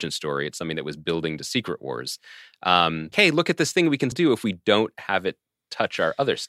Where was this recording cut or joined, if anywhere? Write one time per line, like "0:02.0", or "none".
0:03.1
0:04.1